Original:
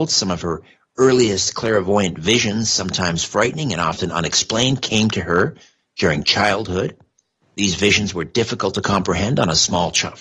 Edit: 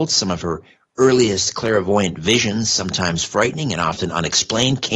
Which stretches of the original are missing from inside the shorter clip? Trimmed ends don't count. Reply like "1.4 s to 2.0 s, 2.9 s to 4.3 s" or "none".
none